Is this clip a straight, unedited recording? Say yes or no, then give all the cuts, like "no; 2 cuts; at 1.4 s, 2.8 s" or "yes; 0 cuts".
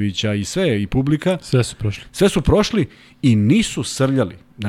yes; 0 cuts